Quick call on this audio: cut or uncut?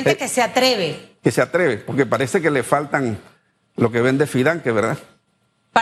uncut